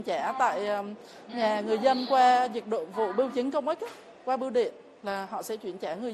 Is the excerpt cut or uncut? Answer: uncut